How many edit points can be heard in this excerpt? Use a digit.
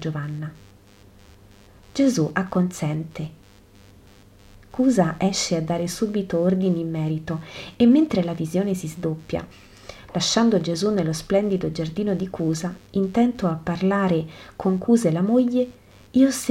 0